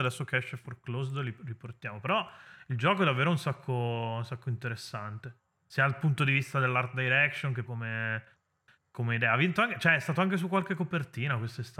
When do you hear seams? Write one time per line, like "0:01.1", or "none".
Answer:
0:07.7